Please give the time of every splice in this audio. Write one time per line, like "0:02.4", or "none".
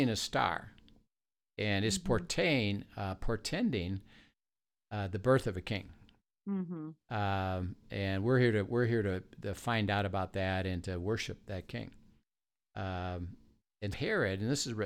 0:13.9